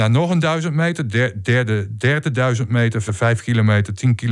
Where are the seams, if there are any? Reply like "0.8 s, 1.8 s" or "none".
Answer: 3.1 s